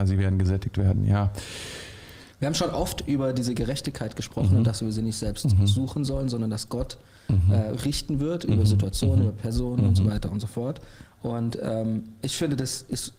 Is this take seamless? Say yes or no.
no